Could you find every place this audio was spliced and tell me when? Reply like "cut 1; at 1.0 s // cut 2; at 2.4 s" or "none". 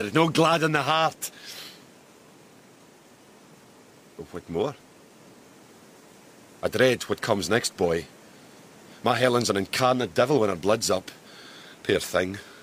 none